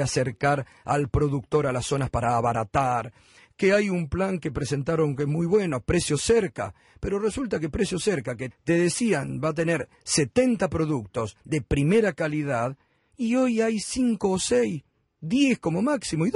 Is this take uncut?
no; 1 cut; at 8.5 s

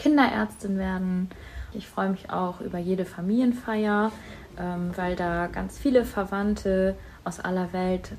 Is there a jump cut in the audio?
yes; 1 cut; at 1.7 s

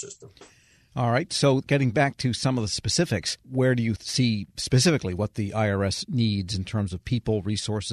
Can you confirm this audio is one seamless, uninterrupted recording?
yes; 0 cuts

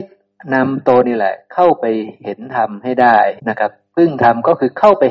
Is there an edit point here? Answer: yes; 2 cuts; at 1.0 s, 3.4 s

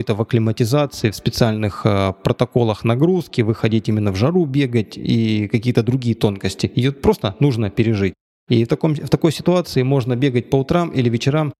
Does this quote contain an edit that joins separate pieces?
no; 0 cuts

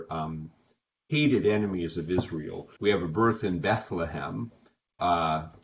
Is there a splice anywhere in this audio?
yes; 1 cut; at 2.8 s

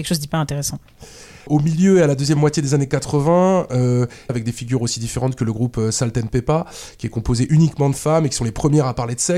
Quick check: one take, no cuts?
no; 1 cut; at 4.3 s

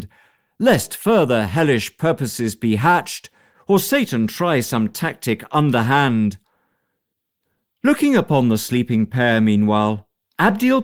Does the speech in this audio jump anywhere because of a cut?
no; 0 cuts

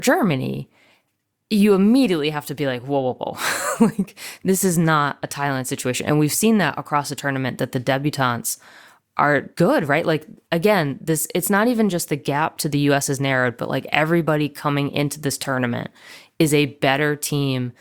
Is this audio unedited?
yes; 0 cuts

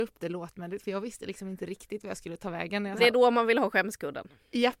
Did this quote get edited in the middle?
yes; 1 cut; at 3.0 s

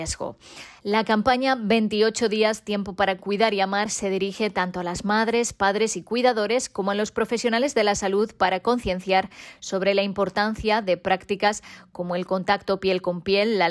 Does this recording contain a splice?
no; 0 cuts

